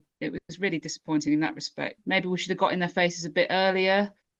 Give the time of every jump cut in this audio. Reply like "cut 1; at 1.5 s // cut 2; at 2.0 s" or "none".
cut 1; at 2.0 s